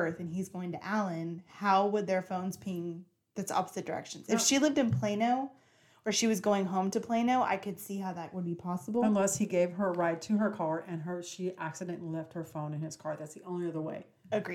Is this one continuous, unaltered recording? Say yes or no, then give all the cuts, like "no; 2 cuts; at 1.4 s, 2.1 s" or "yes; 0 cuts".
yes; 0 cuts